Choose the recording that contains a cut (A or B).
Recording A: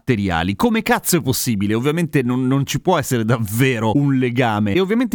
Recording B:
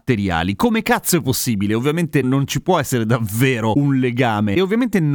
B